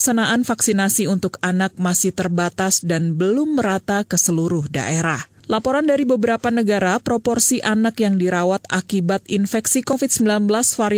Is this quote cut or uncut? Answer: uncut